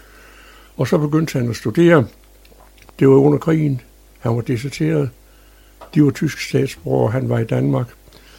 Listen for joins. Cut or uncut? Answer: cut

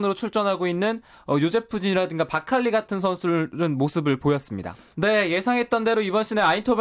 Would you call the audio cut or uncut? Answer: cut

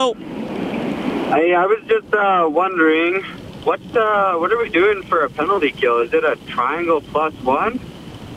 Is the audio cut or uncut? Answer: uncut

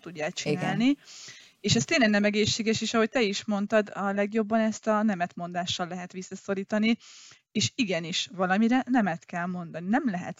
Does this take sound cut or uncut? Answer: uncut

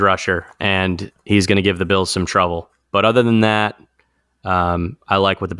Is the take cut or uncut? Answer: uncut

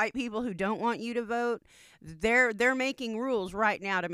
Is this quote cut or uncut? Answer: uncut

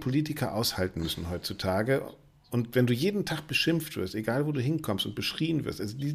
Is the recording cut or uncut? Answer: uncut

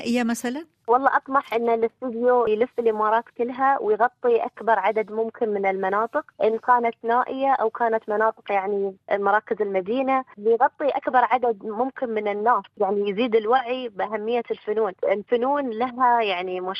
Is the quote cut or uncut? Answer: cut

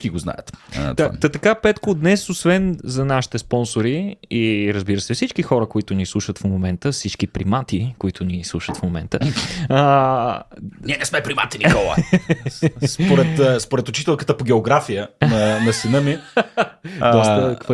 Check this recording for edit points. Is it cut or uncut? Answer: uncut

